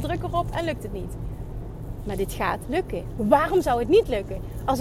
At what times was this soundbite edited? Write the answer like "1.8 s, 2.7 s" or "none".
none